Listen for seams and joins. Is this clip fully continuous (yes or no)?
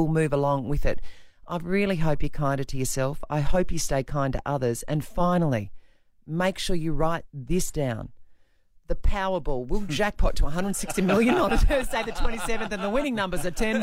yes